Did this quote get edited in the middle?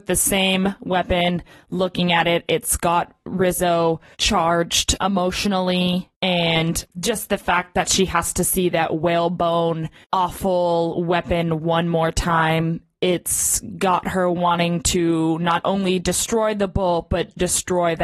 no; 0 cuts

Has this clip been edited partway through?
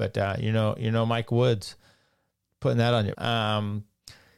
yes; 1 cut; at 3.1 s

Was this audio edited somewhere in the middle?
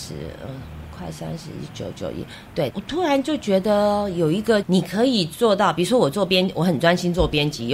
yes; 2 cuts; at 2.7 s, 4.6 s

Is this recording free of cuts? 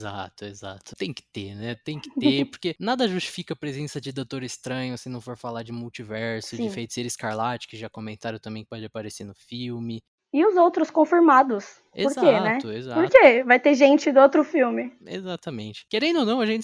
yes; 0 cuts

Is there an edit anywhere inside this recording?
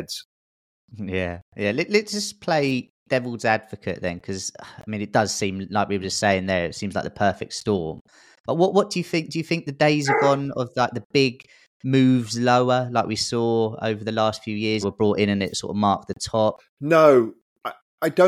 yes; 2 cuts; at 14.8 s, 16.6 s

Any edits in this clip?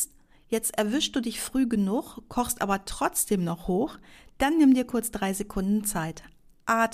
no; 0 cuts

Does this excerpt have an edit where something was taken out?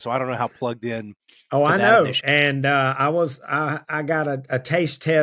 yes; 1 cut; at 2.2 s

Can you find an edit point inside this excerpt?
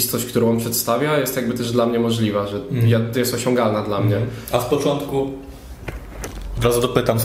no; 0 cuts

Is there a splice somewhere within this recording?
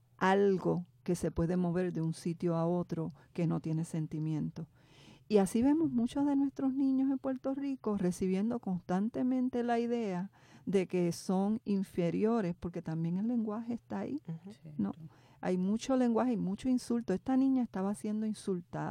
no; 0 cuts

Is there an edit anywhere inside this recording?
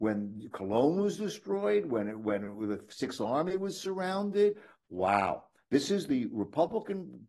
yes; 1 cut; at 4.8 s

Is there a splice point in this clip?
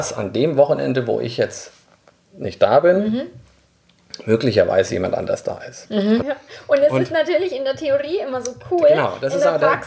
yes; 1 cut; at 6.2 s

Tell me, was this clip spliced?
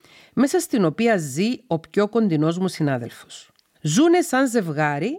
yes; 1 cut; at 3.7 s

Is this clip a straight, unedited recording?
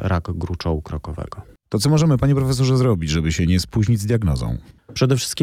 yes; 0 cuts

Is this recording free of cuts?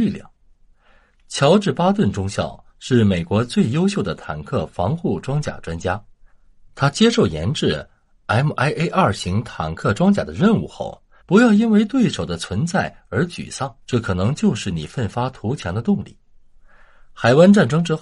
no; 2 cuts; at 11.2 s, 13.8 s

